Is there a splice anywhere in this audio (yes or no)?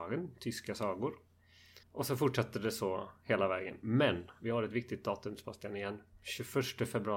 yes